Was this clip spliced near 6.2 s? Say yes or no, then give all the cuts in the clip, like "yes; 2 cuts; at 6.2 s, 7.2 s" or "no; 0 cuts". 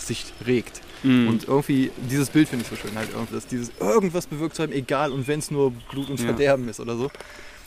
no; 1 cut; at 3.3 s